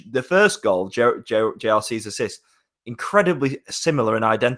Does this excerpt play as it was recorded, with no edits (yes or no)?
yes